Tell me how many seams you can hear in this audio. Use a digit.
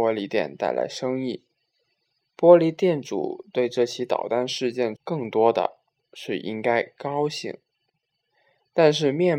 1